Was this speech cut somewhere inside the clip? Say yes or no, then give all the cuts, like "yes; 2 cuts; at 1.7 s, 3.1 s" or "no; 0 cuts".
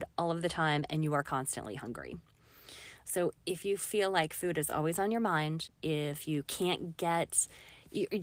no; 0 cuts